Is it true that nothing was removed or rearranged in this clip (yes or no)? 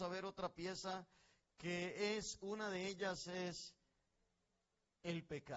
yes